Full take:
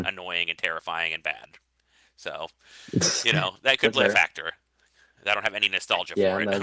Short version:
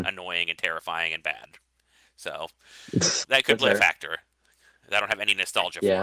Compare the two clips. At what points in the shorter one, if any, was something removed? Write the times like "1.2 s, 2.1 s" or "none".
3.2 s